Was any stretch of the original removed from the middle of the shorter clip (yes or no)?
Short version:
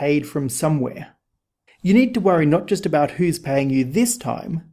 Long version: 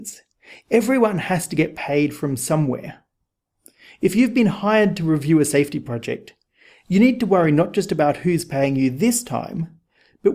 yes